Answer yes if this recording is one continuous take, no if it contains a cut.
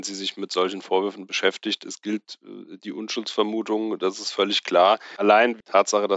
yes